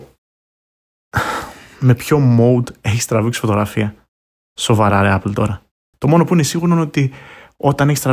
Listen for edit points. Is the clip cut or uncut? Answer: cut